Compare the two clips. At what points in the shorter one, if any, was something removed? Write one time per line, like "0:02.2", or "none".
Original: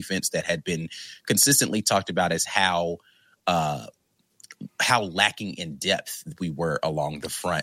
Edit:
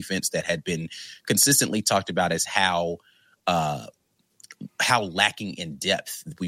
none

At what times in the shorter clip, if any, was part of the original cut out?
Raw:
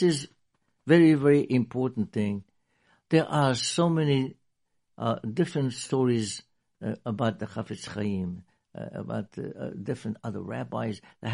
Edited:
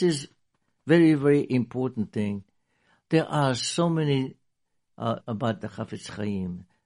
0:05.2

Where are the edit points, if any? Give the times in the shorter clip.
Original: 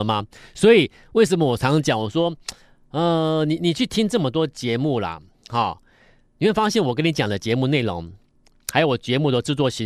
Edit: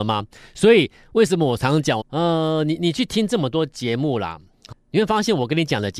0:02.0
0:04.7

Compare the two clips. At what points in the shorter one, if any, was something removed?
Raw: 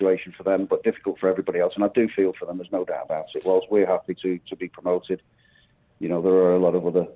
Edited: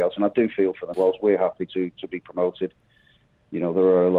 0:00.9

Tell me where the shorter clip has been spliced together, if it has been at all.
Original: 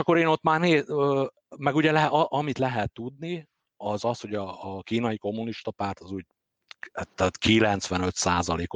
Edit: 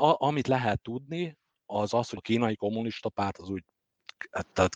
0:02.2

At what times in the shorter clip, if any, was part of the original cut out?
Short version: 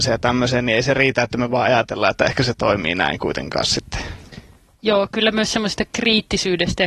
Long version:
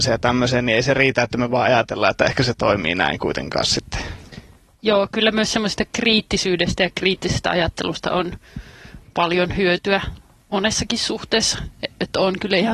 none

